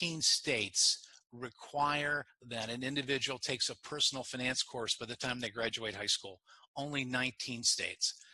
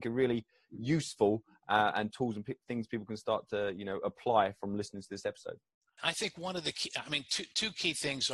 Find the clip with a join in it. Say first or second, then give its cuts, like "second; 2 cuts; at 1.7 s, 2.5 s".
second; 1 cut; at 6.0 s